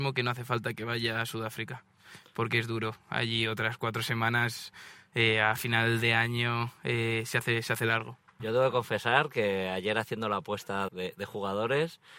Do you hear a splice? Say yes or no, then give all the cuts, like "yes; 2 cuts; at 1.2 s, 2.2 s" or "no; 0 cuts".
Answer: yes; 2 cuts; at 8.4 s, 10.9 s